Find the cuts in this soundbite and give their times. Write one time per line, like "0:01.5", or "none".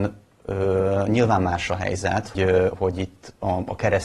0:02.4